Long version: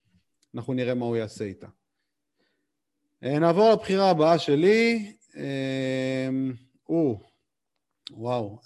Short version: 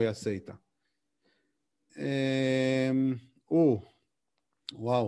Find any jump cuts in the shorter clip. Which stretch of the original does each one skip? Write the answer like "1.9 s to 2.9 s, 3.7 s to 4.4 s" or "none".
3.0 s to 5.3 s

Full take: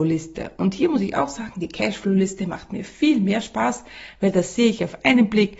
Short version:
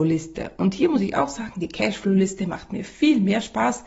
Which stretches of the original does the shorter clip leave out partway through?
none

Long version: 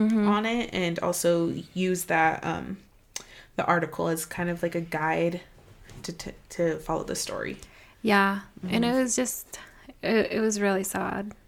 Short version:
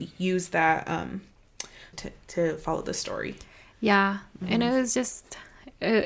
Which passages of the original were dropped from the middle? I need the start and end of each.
3.5 s to 6.1 s

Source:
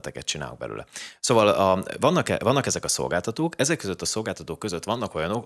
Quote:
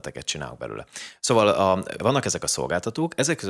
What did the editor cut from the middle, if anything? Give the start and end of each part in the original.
2.0 s to 2.4 s

